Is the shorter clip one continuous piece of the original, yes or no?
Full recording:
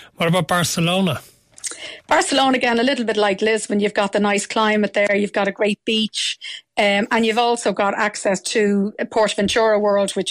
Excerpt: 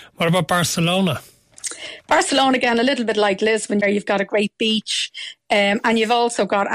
no